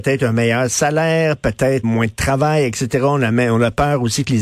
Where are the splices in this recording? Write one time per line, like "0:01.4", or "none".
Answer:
0:01.8

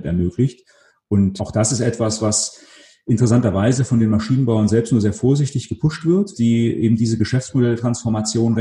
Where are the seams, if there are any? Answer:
0:01.4
0:06.3

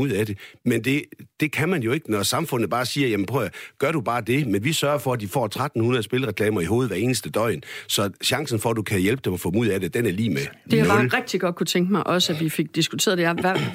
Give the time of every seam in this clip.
none

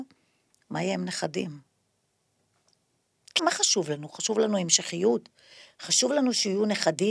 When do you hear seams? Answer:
0:03.4

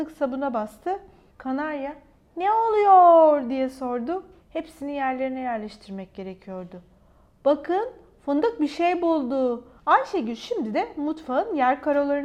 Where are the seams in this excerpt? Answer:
0:01.3
0:04.4
0:09.7

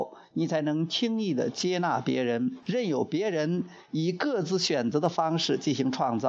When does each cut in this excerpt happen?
0:02.6

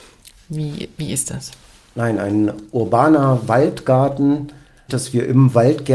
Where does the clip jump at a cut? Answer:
0:04.9

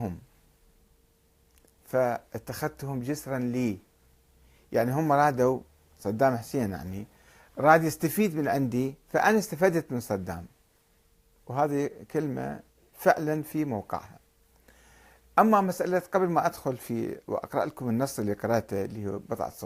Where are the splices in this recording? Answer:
none

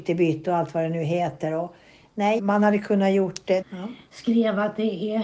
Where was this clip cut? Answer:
0:02.4
0:03.6

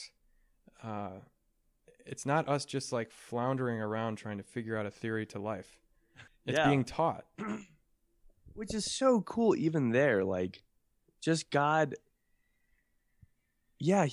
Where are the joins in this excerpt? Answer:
0:06.3

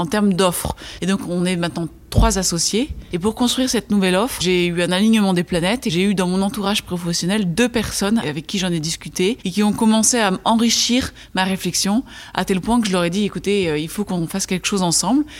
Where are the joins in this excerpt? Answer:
0:01.0
0:03.1

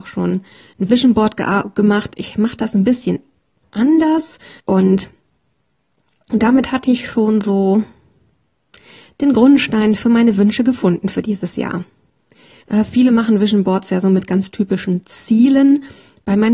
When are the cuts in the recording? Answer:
0:04.6
0:12.6

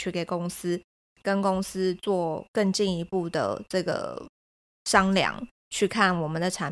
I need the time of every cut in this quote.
none

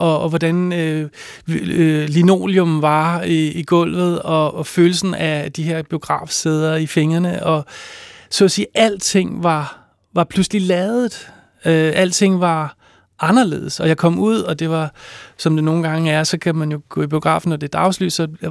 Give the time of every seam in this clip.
none

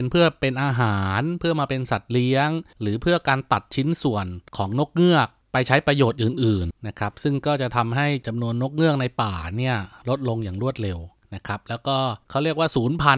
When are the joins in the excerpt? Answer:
0:06.7

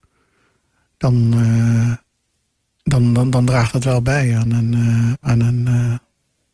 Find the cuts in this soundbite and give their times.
0:05.2

